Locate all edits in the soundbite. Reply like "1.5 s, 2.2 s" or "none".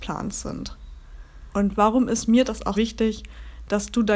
1.5 s, 2.7 s